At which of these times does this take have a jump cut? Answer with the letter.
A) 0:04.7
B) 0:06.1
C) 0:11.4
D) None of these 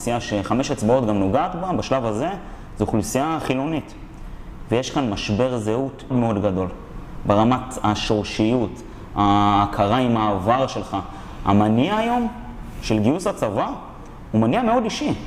B